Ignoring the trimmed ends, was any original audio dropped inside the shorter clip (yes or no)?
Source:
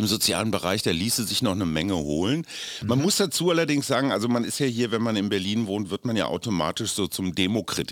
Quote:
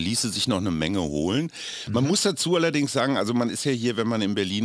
no